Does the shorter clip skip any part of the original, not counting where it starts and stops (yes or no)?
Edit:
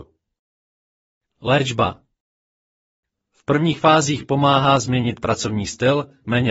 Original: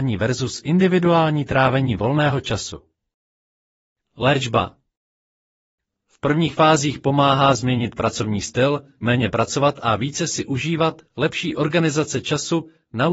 no